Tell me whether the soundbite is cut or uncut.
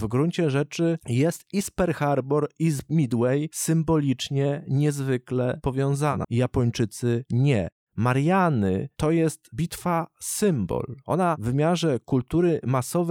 cut